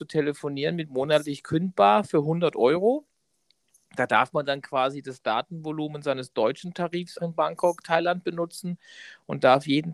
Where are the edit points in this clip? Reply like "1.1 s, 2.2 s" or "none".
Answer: 7.2 s